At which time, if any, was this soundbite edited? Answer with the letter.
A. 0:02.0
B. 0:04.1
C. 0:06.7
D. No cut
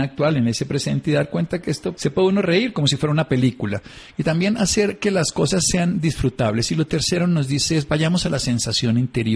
A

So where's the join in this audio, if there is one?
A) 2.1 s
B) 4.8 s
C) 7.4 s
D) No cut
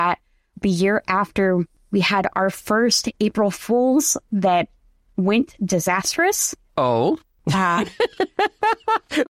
C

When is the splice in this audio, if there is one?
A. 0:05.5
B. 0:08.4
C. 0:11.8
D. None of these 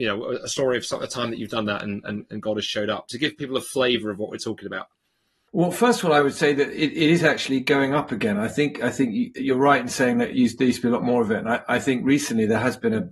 A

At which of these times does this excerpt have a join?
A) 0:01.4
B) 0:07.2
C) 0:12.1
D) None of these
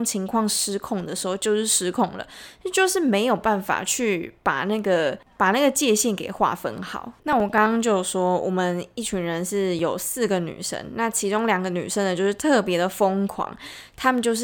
D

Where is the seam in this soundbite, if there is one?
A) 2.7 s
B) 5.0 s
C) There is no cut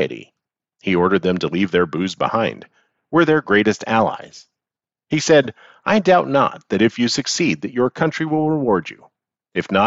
C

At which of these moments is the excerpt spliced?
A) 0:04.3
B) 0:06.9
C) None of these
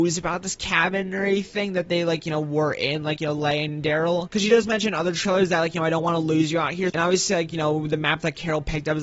B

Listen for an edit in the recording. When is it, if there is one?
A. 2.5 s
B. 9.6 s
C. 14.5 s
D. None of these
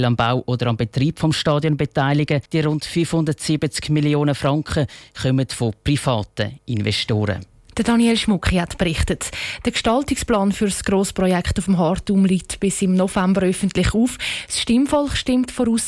A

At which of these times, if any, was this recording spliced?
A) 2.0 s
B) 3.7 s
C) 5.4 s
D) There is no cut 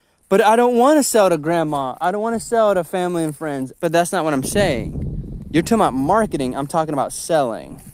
B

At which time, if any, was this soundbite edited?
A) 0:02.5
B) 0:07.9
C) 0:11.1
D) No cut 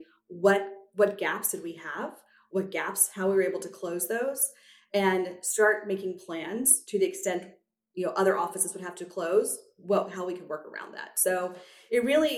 D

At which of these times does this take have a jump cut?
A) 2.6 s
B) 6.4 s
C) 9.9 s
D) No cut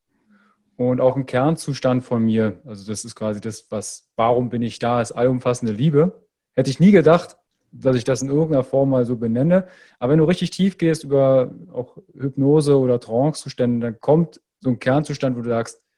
C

